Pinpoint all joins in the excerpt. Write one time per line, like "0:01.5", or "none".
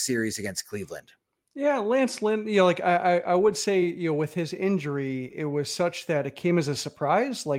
none

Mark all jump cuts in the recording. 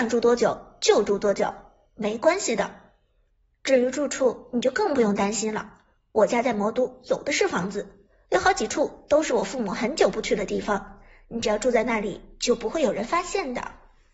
none

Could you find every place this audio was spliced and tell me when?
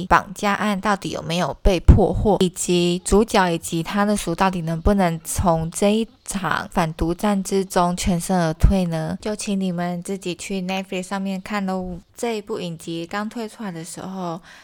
0:04.2
0:12.1

